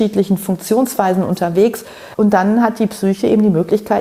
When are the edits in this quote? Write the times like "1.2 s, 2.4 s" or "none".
2.1 s